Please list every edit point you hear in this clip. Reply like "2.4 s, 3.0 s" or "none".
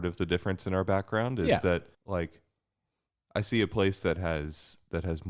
1.9 s